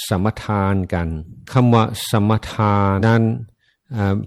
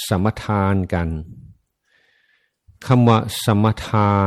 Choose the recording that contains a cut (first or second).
first